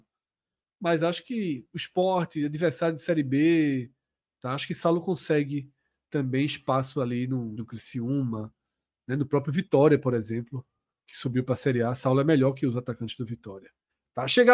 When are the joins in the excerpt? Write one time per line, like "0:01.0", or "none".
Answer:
0:07.6